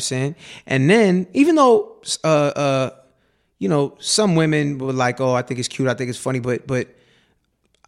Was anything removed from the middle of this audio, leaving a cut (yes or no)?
no